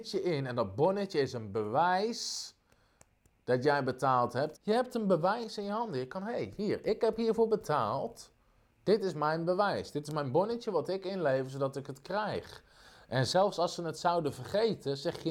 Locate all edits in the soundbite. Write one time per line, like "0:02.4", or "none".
0:04.5